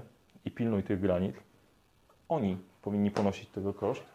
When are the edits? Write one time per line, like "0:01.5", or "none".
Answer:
0:02.2